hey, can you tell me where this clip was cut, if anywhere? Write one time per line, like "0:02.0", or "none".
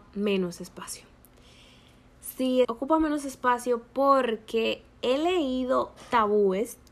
0:02.6